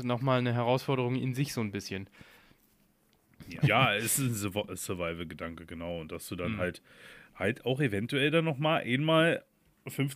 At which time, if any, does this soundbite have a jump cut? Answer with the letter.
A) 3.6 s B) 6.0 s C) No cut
A